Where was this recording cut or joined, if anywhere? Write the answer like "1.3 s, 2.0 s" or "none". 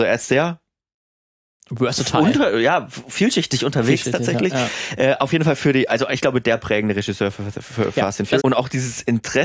8.4 s